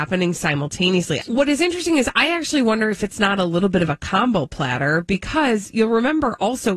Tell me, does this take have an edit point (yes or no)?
yes